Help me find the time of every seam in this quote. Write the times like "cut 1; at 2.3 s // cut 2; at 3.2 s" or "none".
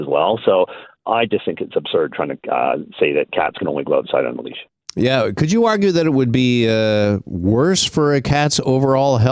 none